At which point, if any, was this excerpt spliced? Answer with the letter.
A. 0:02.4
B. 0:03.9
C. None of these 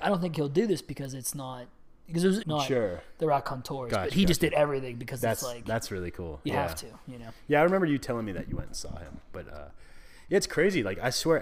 A